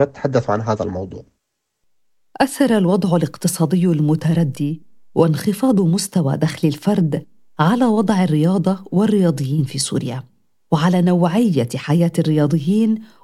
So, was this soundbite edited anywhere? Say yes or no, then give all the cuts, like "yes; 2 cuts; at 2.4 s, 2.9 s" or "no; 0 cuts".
no; 0 cuts